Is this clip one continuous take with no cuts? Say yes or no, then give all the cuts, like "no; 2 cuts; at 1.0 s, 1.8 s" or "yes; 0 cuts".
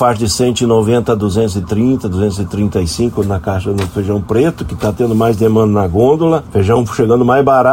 yes; 0 cuts